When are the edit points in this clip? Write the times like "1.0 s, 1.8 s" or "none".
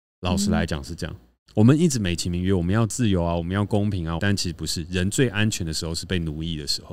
4.2 s